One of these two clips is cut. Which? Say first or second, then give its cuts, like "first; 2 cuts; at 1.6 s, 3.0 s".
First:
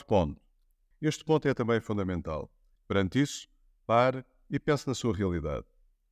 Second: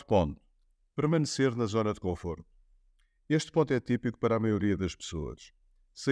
first; 2 cuts; at 0.9 s, 2.8 s